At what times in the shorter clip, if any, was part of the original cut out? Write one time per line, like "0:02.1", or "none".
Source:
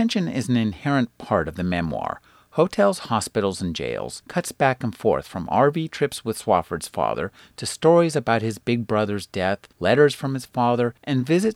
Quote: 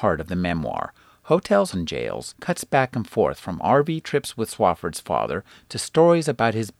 0:01.7